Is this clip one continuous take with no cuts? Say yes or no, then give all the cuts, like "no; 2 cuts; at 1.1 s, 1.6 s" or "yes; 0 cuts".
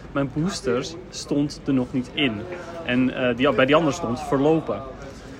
yes; 0 cuts